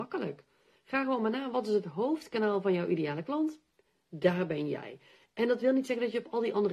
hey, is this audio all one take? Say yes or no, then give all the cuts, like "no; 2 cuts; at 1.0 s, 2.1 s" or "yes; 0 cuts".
yes; 0 cuts